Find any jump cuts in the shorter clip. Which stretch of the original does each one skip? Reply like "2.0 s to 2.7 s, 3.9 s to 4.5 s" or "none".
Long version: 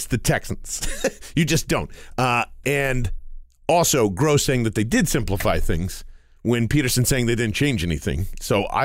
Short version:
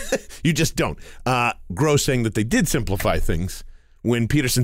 2.6 s to 4.1 s